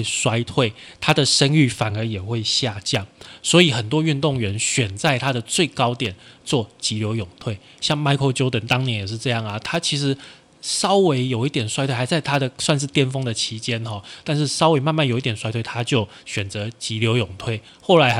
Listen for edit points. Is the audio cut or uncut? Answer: uncut